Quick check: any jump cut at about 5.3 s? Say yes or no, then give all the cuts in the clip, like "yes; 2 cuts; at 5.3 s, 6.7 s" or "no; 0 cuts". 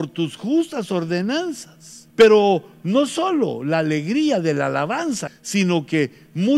yes; 2 cuts; at 2.1 s, 5.3 s